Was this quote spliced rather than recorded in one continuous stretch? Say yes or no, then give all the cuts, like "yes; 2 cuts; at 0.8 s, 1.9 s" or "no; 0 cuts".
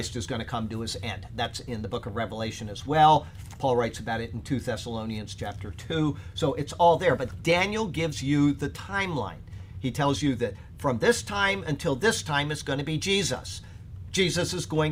no; 0 cuts